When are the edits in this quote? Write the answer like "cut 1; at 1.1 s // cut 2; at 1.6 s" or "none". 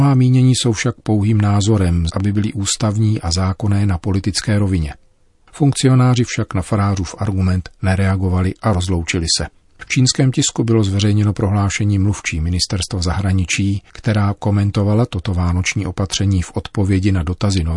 cut 1; at 2.1 s